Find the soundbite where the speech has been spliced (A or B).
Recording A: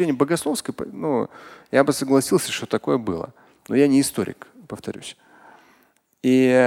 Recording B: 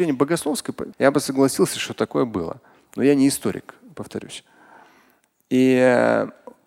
B